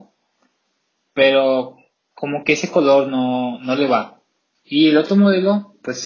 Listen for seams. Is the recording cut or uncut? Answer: cut